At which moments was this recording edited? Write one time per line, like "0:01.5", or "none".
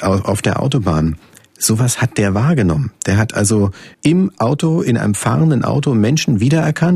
0:03.9